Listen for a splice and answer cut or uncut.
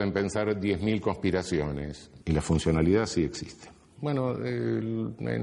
cut